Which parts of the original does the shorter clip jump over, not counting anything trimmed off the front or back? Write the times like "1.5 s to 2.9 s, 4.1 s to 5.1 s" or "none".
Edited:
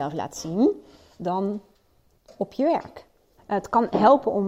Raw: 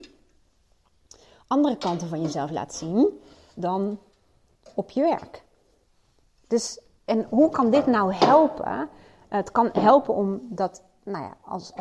5.8 s to 9.2 s